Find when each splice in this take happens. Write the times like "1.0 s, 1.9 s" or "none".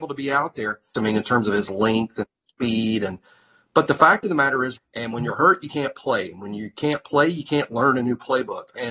0.9 s, 4.8 s